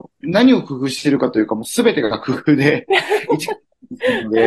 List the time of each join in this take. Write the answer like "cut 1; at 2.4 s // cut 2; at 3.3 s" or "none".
none